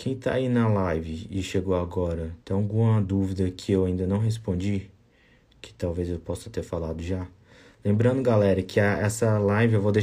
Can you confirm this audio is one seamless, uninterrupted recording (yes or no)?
no